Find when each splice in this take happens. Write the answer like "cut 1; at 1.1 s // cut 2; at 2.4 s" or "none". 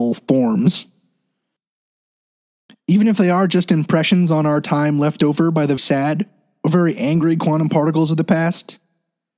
cut 1; at 2.7 s // cut 2; at 5.8 s